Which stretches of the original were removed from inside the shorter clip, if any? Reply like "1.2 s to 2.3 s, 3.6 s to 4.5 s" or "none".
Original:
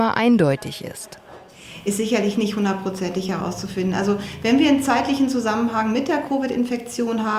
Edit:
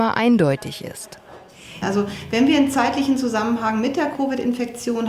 1.8 s to 3.9 s